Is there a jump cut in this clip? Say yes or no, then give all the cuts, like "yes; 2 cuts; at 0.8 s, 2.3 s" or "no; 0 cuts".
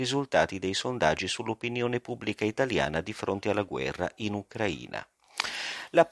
no; 0 cuts